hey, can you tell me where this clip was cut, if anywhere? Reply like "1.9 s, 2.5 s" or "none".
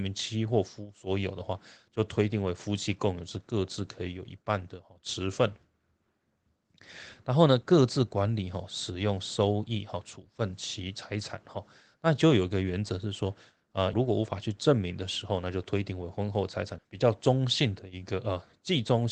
11.9 s, 13.9 s, 16.8 s